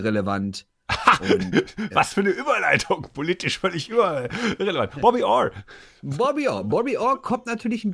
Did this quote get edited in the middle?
no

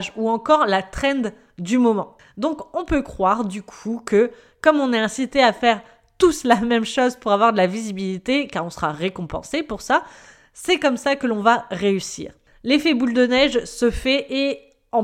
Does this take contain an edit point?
yes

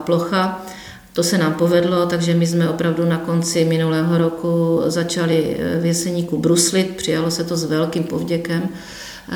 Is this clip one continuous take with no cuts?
yes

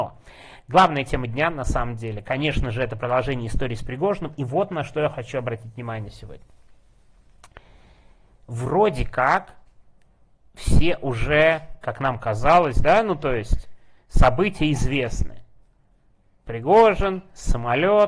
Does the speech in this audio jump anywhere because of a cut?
no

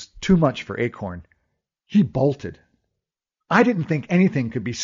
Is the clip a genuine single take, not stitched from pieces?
yes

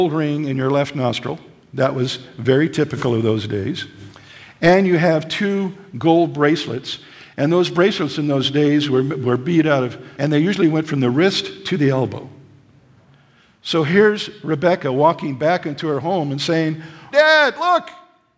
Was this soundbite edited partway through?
yes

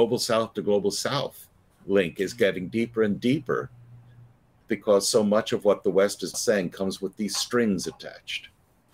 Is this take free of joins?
no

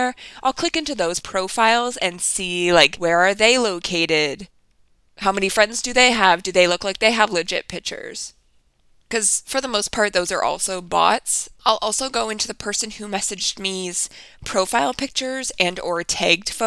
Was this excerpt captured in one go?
no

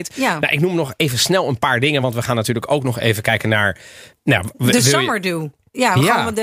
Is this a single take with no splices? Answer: yes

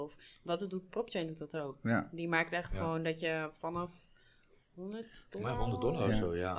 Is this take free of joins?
yes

